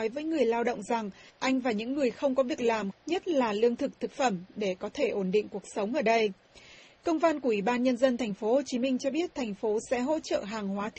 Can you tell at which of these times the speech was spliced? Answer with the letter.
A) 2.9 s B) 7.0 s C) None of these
A